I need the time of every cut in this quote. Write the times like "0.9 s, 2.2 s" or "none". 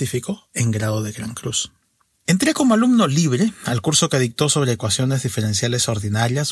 none